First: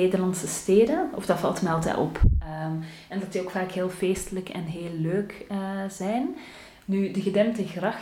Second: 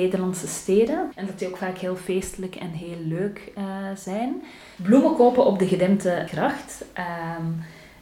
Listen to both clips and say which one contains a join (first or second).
second